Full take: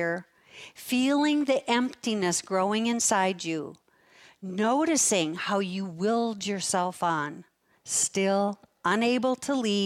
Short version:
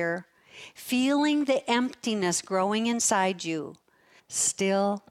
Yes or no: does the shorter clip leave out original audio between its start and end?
yes